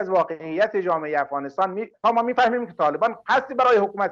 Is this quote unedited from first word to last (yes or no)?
no